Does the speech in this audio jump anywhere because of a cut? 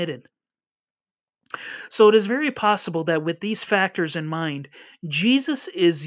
no; 0 cuts

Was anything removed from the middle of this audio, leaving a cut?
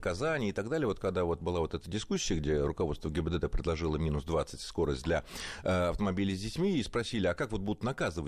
no; 0 cuts

